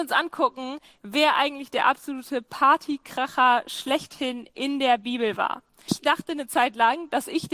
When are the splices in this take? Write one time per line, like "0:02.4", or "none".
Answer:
0:05.9